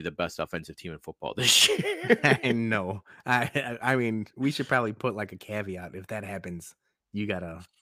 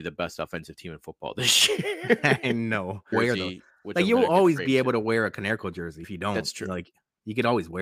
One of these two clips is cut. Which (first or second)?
second